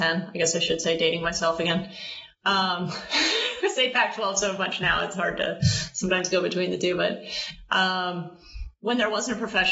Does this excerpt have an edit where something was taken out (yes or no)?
no